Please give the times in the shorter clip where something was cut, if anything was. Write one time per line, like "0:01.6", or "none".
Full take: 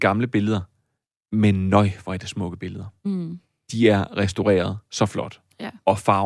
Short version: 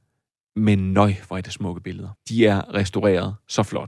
0:02.2